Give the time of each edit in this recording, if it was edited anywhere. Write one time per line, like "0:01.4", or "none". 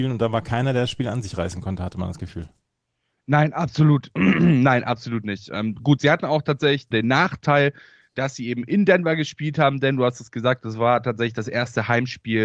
0:06.9